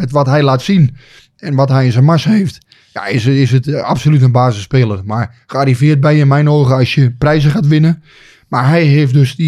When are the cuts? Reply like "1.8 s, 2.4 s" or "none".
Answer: none